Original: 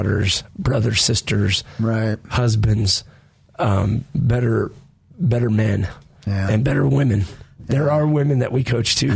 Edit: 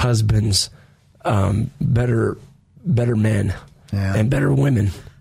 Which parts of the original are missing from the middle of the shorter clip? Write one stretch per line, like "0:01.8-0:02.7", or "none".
none